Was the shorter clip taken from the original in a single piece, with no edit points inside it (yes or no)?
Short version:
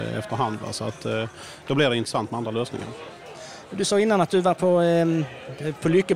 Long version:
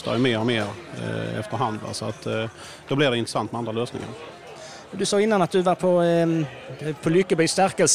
yes